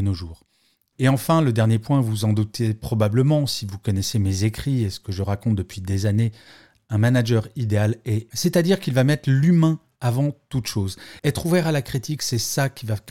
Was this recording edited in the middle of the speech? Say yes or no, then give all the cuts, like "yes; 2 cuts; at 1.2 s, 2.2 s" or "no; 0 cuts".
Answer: yes; 2 cuts; at 8.3 s, 11.2 s